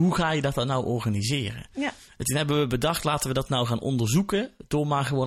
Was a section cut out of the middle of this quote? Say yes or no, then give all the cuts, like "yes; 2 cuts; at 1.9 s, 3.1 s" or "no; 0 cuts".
no; 0 cuts